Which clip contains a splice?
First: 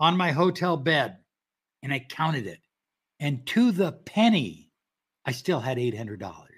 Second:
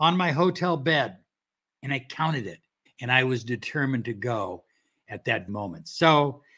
second; 2 cuts; at 2.9 s, 5.5 s

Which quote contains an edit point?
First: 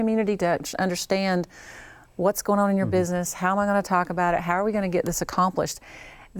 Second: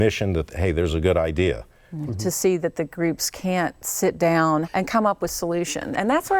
second; 2 cuts; at 2.1 s, 4.6 s

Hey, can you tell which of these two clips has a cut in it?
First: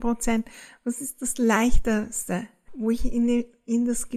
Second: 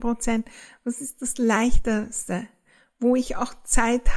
first; 1 cut; at 2.7 s

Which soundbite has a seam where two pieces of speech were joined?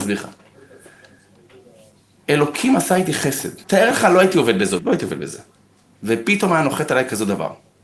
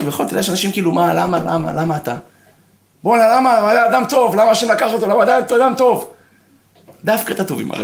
first; 2 cuts; at 3.6 s, 4.8 s

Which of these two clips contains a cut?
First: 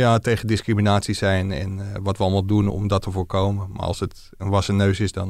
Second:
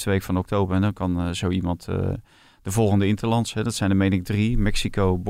first; 1 cut; at 2.7 s

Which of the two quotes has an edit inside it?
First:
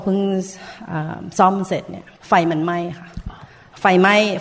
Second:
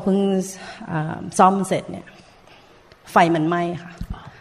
first; 1 cut; at 2.2 s

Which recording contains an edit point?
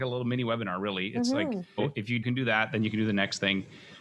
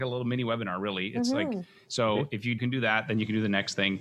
first; 1 cut; at 1.8 s

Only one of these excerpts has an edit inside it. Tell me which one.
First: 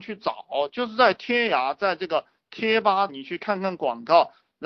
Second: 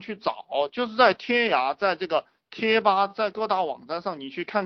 first; 1 cut; at 3.1 s

